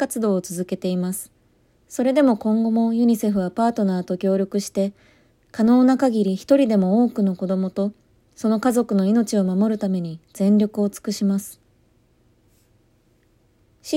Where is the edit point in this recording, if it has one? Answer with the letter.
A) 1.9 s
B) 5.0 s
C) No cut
A